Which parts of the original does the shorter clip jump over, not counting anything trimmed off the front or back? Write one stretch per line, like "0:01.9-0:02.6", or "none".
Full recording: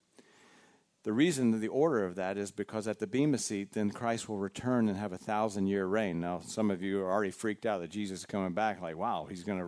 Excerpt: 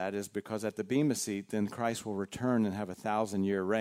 none